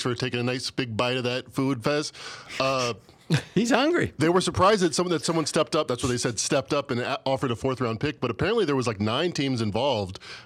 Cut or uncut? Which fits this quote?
uncut